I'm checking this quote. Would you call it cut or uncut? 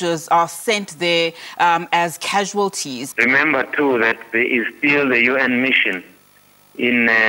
cut